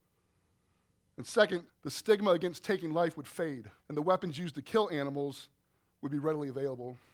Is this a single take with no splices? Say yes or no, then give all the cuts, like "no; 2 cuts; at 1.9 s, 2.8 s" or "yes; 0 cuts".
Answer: no; 2 cuts; at 1.7 s, 3.8 s